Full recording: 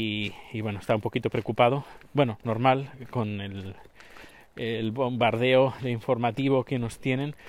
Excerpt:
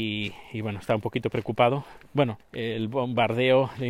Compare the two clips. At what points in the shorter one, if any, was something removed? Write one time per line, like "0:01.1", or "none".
0:02.4